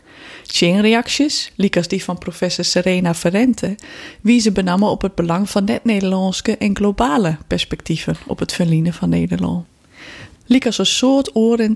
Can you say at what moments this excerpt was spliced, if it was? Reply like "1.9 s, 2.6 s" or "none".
10.3 s